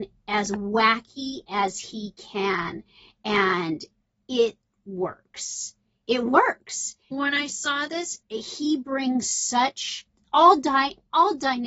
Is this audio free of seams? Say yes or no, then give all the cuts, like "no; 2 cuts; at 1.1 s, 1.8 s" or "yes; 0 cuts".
no; 2 cuts; at 7.1 s, 8.2 s